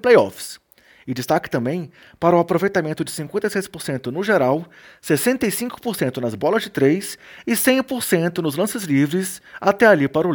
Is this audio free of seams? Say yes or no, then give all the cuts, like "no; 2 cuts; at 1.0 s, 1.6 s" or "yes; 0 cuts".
yes; 0 cuts